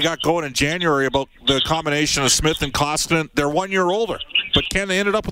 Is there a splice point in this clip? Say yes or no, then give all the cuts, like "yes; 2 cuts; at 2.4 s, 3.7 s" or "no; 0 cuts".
no; 0 cuts